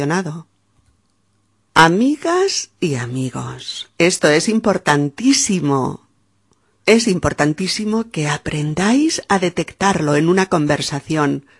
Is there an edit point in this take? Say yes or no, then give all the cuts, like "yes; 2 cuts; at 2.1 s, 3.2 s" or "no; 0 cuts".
no; 0 cuts